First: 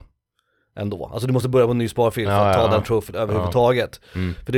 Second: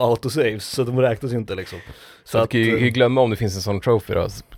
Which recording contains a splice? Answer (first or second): second